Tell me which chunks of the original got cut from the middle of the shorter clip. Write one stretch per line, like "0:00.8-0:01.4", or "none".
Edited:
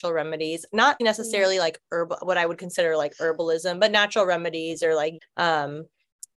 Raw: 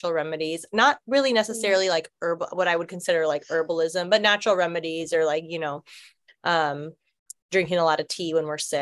0:01.0-0:01.3
0:05.5-0:06.2